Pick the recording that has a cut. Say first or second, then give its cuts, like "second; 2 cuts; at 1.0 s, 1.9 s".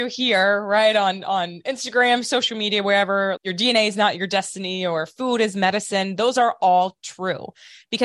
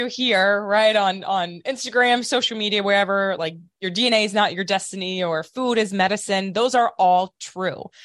first; 1 cut; at 3.4 s